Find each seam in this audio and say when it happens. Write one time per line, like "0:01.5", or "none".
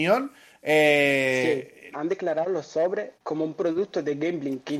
0:01.9
0:03.2